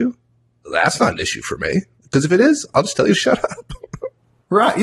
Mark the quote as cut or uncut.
uncut